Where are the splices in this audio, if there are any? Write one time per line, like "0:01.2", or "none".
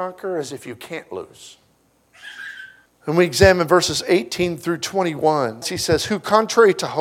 0:02.9
0:05.6

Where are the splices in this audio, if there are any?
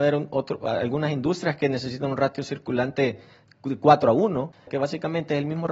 0:04.7

